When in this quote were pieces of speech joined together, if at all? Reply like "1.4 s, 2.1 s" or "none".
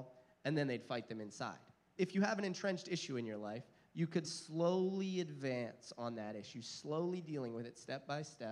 2.0 s, 4.2 s